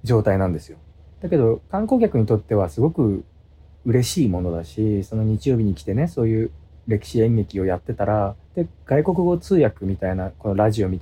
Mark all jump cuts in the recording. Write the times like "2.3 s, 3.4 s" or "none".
1.1 s, 8.4 s